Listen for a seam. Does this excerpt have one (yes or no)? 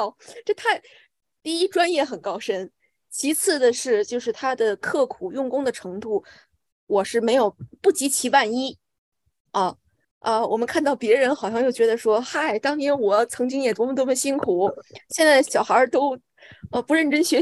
yes